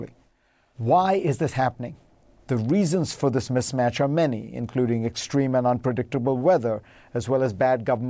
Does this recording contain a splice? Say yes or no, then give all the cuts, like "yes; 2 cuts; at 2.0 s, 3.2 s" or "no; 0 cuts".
yes; 1 cut; at 2.4 s